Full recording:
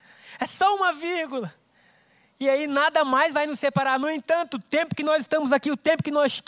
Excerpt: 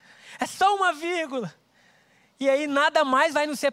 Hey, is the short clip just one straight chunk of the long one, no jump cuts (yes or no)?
yes